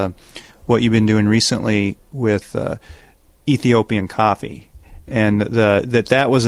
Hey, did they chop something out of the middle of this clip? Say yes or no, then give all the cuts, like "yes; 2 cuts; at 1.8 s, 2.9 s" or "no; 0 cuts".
no; 0 cuts